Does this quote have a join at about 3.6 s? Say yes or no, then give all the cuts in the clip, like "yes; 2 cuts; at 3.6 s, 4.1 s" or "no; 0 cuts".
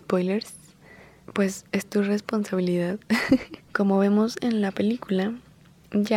yes; 2 cuts; at 1.2 s, 3.6 s